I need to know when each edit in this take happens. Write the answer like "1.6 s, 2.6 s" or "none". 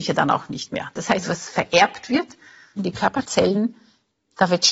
1.2 s, 2.8 s